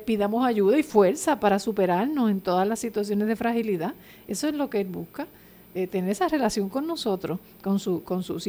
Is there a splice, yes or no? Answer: no